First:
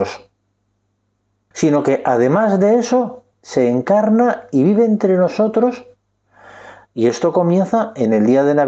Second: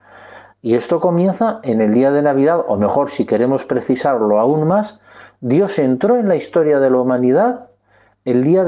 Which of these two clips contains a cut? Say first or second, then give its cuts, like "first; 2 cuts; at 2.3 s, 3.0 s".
first; 2 cuts; at 1.5 s, 3.3 s